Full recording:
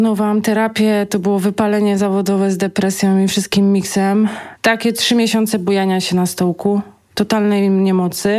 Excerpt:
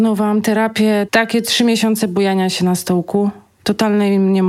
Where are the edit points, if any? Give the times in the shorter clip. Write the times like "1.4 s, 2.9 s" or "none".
1.1 s